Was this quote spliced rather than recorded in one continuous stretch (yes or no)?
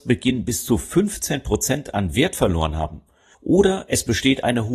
yes